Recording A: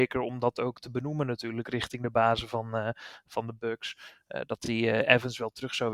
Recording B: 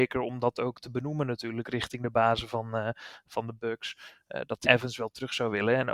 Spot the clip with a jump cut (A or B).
B